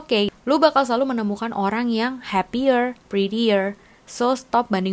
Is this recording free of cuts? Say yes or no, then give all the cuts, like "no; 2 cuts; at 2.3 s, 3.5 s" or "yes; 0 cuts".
no; 1 cut; at 3.0 s